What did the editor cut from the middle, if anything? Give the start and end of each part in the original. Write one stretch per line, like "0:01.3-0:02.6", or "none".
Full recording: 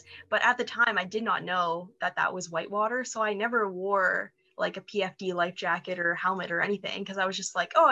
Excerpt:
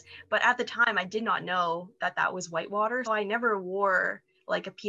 0:03.0-0:03.1